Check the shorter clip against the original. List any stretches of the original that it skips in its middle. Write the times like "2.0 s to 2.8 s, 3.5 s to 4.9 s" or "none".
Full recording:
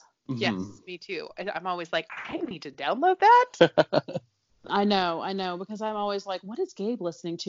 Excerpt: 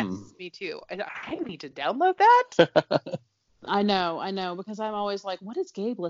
1.5 s to 2.1 s